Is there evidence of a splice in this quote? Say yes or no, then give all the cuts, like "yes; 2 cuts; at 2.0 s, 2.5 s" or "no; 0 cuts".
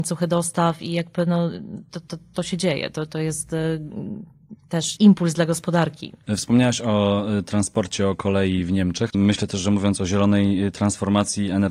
yes; 1 cut; at 9.1 s